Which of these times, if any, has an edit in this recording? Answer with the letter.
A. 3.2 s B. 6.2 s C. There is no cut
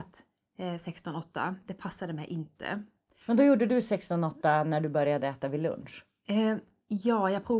A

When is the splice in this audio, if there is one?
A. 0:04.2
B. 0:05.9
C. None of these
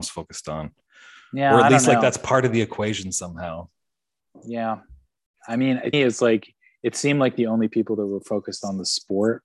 B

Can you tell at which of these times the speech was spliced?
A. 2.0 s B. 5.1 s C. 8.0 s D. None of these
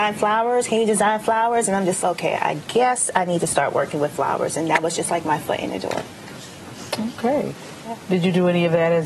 A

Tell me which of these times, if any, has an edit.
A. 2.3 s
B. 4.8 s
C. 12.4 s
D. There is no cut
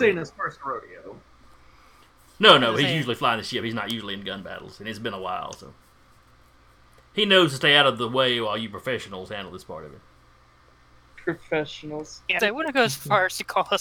C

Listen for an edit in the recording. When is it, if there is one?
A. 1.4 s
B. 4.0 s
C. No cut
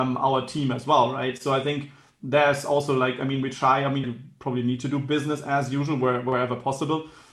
B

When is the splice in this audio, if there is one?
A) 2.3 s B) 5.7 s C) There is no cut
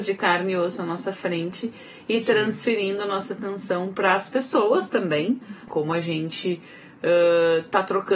B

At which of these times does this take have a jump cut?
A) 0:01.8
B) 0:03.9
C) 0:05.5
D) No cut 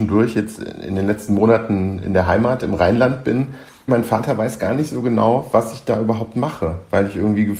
B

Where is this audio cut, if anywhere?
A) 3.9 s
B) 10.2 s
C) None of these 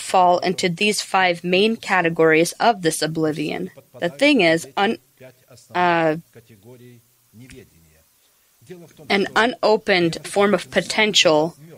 B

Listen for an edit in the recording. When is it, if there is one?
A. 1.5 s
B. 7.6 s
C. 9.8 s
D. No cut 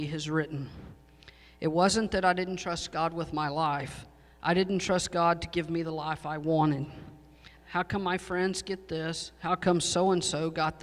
B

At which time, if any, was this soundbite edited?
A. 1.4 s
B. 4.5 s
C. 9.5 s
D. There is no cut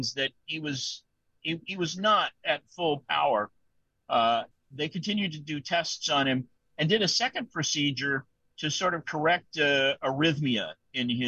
B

